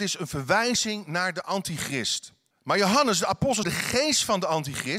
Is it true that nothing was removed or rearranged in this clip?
no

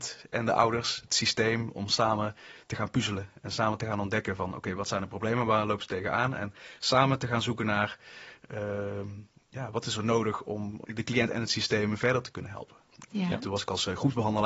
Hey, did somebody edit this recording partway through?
yes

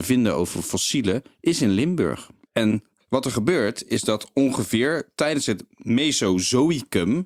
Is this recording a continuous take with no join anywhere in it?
yes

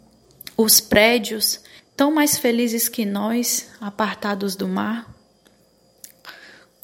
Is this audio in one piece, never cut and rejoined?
no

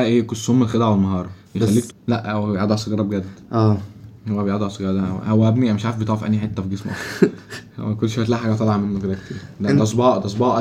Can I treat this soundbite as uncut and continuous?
no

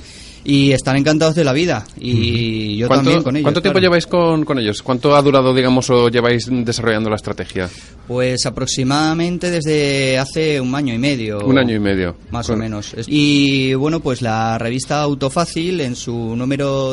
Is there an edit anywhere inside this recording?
yes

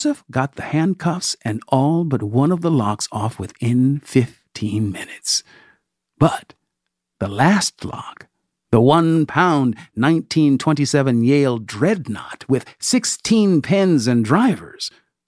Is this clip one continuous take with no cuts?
yes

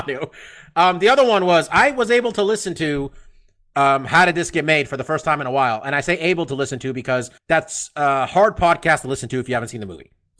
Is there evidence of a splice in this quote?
yes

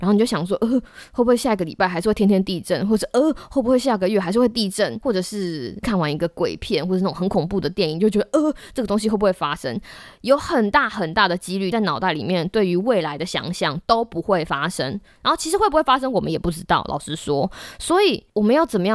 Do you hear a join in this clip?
no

